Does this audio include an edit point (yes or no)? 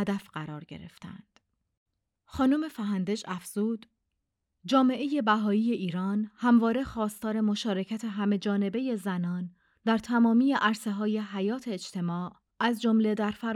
no